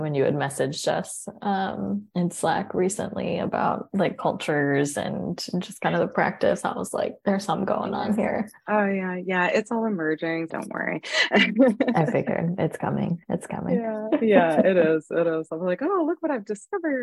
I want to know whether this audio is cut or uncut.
cut